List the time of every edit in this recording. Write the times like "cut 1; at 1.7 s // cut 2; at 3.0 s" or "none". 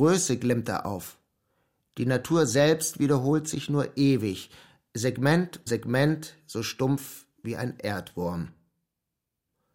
cut 1; at 5.7 s